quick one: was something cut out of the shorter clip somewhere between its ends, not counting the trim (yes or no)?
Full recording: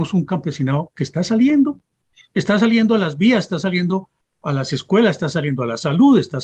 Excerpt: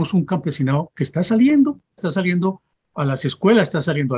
yes